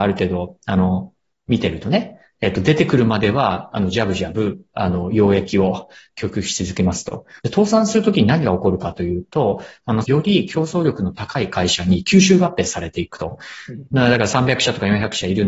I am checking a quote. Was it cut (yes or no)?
yes